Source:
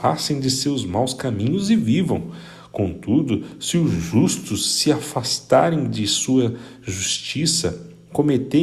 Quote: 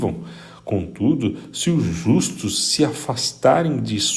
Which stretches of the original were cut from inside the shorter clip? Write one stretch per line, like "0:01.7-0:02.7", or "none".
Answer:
none